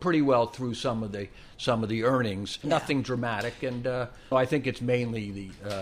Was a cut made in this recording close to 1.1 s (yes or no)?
no